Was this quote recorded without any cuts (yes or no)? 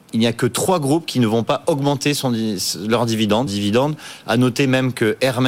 no